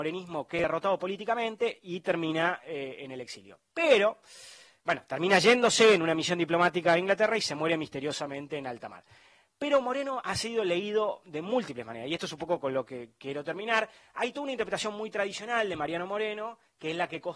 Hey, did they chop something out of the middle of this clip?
no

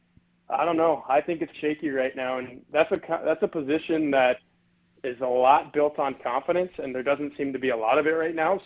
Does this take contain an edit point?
yes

